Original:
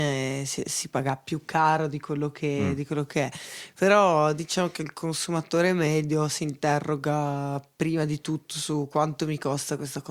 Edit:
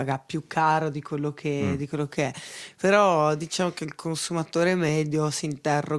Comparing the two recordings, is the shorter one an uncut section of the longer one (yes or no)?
yes